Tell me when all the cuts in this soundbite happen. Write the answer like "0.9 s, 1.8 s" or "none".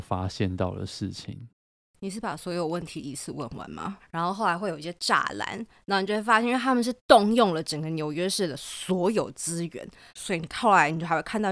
4.0 s, 10.1 s